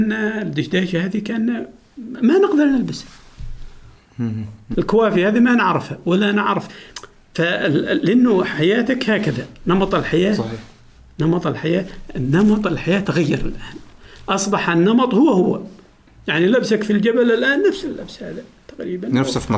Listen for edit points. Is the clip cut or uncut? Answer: cut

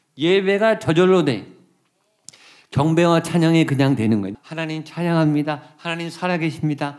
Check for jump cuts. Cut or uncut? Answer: cut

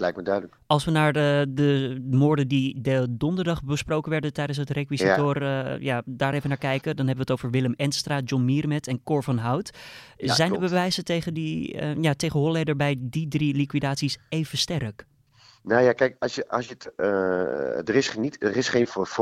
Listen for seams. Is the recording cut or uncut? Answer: uncut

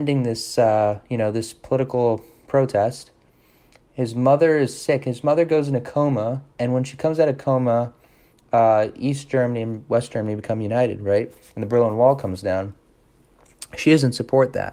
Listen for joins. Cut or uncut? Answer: uncut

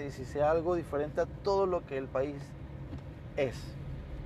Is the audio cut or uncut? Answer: uncut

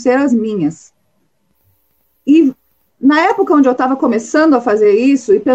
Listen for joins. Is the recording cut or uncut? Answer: uncut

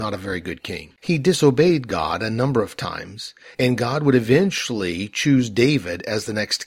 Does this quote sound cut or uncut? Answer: cut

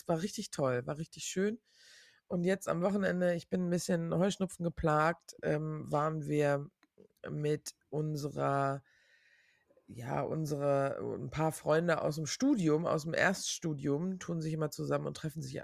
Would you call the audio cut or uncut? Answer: uncut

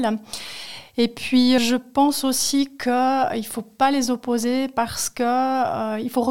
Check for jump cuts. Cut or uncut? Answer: cut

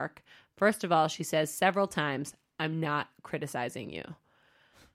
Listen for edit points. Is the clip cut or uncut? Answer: uncut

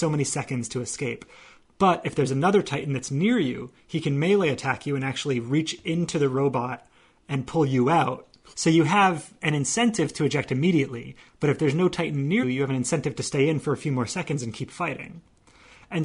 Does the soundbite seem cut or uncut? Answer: cut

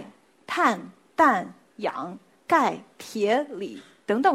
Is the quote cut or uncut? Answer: uncut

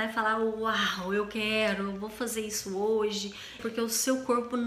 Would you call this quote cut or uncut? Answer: cut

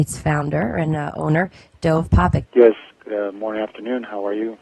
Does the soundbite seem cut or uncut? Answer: cut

